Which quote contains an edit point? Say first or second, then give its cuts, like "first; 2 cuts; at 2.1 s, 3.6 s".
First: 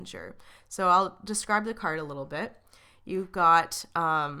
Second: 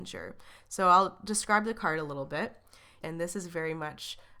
second; 1 cut; at 3.0 s